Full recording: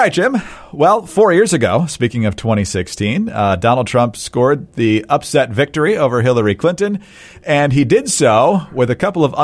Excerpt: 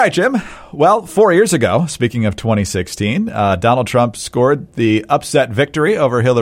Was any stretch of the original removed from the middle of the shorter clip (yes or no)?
no